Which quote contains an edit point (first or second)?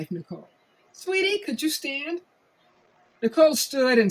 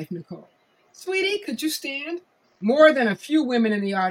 second